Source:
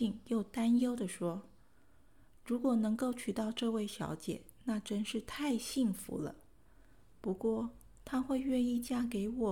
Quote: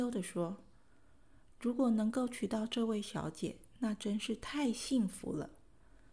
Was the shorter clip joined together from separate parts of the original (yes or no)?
no